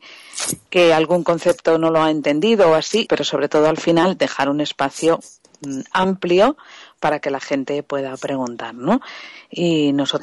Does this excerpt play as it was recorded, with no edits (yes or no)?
no